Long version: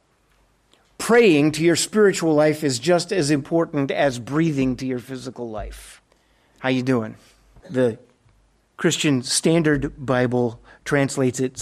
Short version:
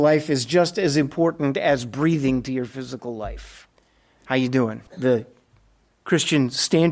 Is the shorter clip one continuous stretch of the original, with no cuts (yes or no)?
no